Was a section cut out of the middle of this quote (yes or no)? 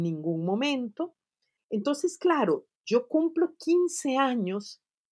yes